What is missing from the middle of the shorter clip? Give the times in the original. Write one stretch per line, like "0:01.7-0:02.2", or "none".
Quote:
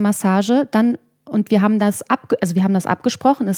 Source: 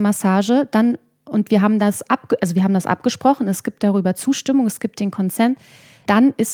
none